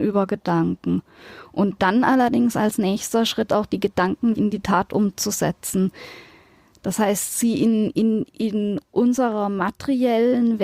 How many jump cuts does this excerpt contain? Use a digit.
1